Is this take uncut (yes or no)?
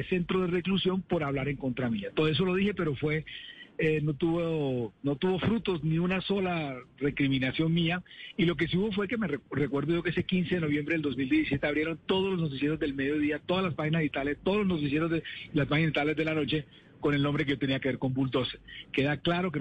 yes